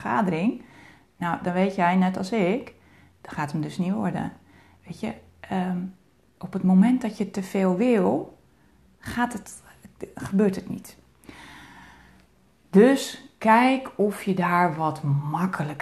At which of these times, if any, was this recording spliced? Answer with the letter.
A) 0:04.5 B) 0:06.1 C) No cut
C